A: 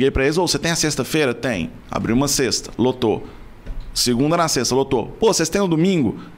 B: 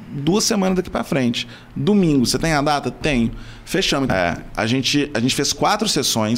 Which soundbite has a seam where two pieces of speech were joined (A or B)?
B